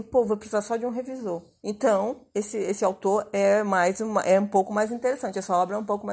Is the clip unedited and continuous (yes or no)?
no